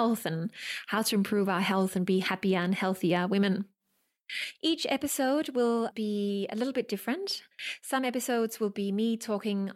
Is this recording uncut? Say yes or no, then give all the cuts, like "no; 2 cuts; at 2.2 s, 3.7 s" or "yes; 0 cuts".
yes; 0 cuts